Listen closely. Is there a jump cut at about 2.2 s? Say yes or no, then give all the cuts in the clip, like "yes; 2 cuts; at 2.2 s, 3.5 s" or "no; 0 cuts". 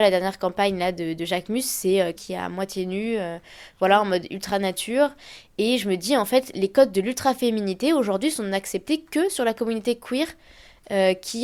yes; 1 cut; at 2.2 s